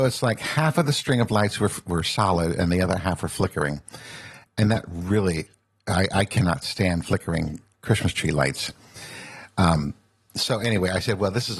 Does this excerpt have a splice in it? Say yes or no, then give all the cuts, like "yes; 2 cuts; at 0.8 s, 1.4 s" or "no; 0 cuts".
yes; 1 cut; at 7.7 s